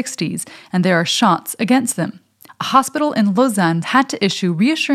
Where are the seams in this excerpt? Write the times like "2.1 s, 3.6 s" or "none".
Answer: 2.5 s, 3.8 s